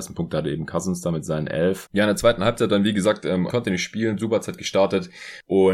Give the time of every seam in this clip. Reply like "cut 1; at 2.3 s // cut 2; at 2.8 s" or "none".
cut 1; at 1.9 s // cut 2; at 3.5 s